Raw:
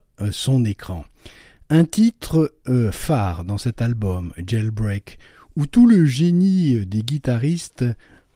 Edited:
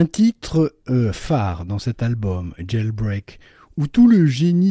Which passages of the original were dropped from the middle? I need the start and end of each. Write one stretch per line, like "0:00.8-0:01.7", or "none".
none